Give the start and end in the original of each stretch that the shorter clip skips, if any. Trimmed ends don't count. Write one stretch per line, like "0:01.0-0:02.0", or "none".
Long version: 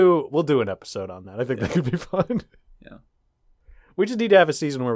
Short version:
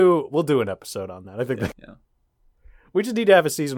0:01.7-0:02.7